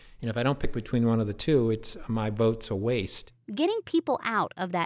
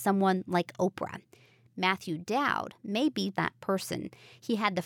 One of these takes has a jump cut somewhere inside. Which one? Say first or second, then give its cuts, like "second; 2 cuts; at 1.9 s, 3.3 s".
second; 1 cut; at 3.3 s